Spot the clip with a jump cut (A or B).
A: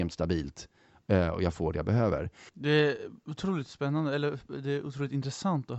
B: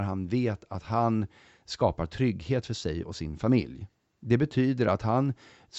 A